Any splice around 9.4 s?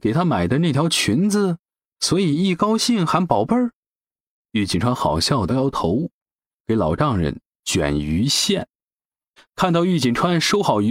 yes; 2 cuts; at 5.5 s, 9.4 s

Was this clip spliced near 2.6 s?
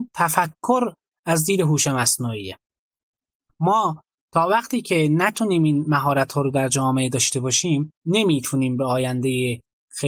no; 1 cut; at 8.0 s

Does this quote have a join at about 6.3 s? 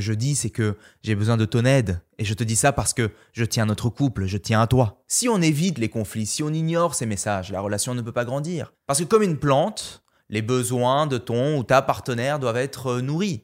no; 1 cut; at 8.8 s

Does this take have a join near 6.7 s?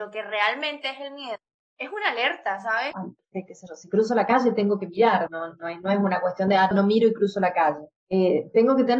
yes; 3 cuts; at 2.9 s, 5.3 s, 6.7 s

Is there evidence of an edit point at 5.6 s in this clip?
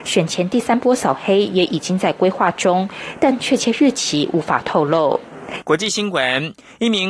yes; 1 cut; at 5.6 s

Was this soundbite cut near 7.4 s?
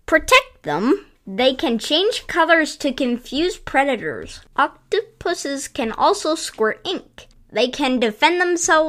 no; 1 cut; at 4.5 s

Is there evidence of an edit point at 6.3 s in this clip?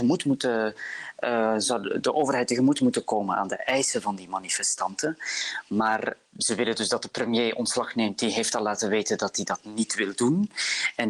yes; 1 cut; at 6.3 s

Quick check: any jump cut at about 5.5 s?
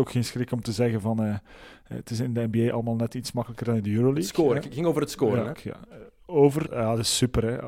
yes; 2 cuts; at 5.5 s, 6.7 s

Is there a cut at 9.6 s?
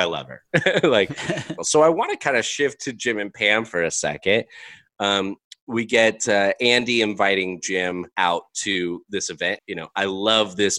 yes; 3 cuts; at 1.6 s, 8.1 s, 9.6 s

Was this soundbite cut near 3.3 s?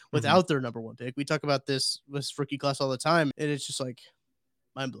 yes; 1 cut; at 3.3 s

